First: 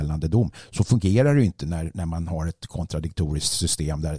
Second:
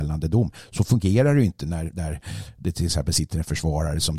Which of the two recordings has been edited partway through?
second; 1 cut; at 1.9 s

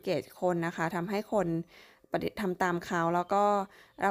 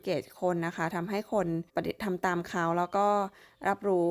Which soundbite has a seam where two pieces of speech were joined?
second; 1 cut; at 1.7 s

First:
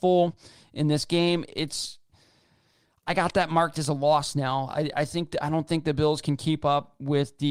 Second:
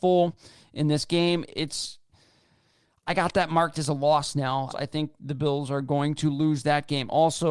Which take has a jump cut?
second; 1 cut; at 4.7 s

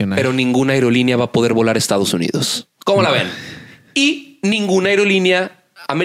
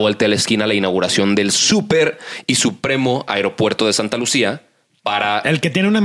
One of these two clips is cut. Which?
first; 1 cut; at 2.7 s

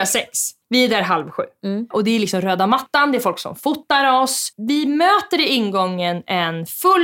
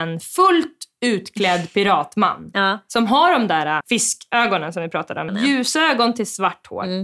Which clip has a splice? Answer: second; 2 cuts; at 3.8 s, 5.3 s

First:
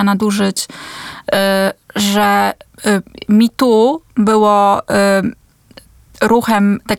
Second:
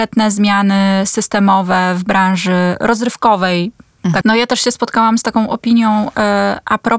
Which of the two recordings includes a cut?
second; 1 cut; at 4.2 s

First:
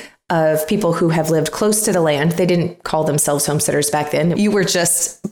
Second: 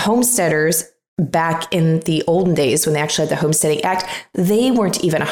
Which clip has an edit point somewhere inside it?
first; 1 cut; at 4.3 s

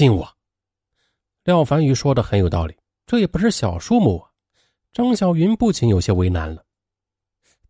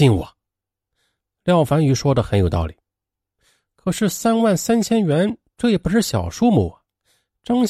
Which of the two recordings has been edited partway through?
first; 1 cut; at 3.0 s

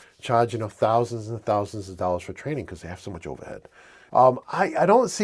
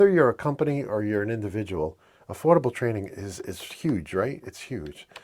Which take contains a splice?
first; 1 cut; at 4.1 s

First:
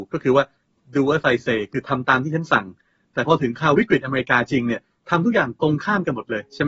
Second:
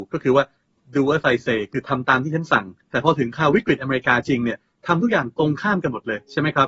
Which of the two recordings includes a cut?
second; 1 cut; at 2.8 s

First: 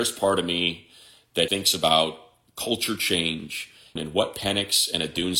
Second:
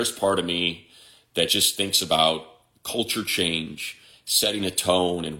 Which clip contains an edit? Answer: first; 2 cuts; at 1.5 s, 4.0 s

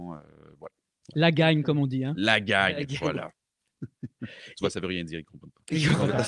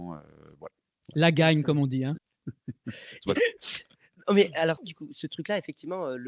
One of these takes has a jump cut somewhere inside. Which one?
second; 3 cuts; at 2.2 s, 3.4 s, 4.8 s

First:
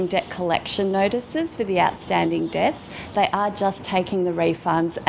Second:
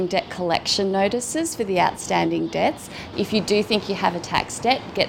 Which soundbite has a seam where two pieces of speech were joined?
second; 1 cut; at 3.1 s

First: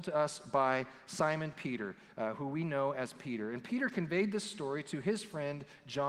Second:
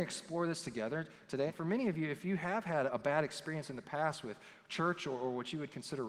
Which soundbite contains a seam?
second; 2 cuts; at 1.5 s, 2.9 s

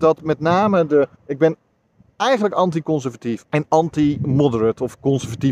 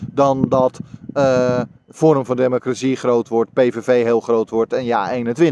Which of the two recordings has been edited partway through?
first; 2 cuts; at 1.1 s, 3.4 s

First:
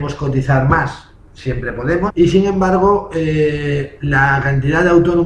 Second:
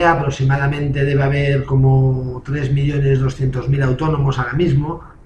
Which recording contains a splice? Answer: first; 1 cut; at 2.1 s

